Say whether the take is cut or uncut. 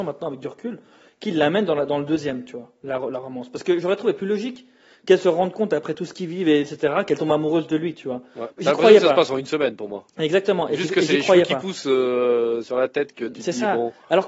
cut